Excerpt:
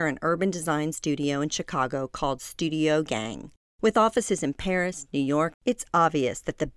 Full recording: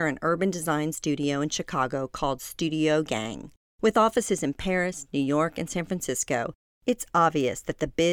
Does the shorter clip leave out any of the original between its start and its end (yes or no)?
yes